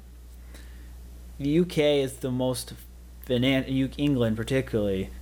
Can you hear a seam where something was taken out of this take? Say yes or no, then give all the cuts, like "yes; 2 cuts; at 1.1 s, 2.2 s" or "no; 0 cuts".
no; 0 cuts